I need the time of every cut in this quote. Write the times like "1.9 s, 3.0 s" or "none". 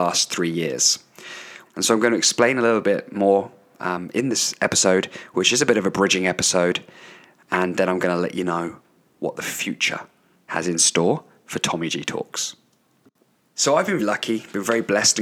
1.7 s, 14.0 s